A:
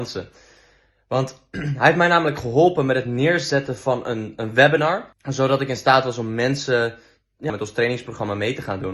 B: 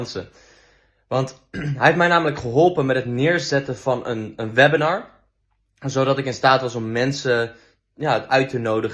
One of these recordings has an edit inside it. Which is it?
A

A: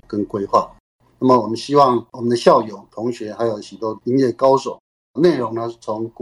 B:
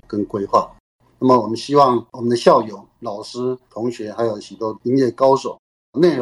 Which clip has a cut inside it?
A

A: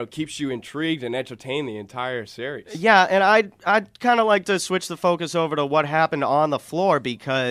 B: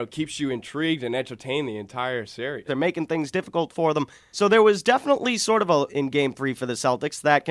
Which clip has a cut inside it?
B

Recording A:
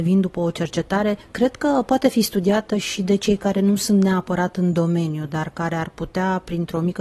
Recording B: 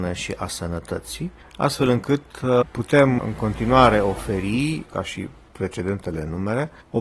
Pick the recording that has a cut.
B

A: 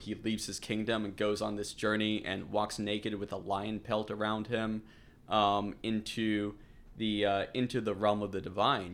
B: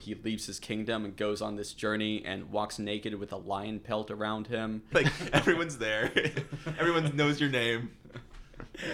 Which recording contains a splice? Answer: B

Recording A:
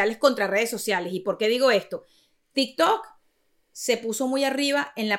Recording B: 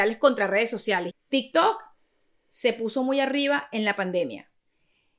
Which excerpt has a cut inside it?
B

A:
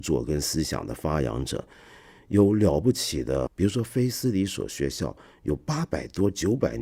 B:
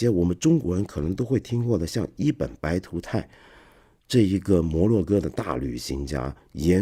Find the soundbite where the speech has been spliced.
A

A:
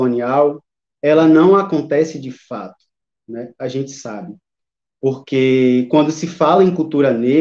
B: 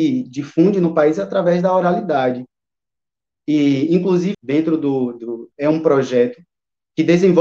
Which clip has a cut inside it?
B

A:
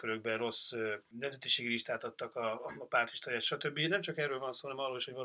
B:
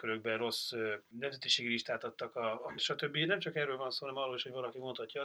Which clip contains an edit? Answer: B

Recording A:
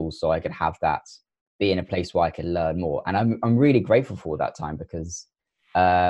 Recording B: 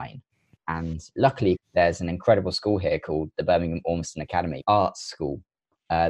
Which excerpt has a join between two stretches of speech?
B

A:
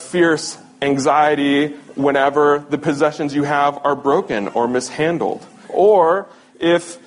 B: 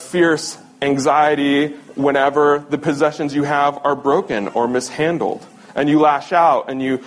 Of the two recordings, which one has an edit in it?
A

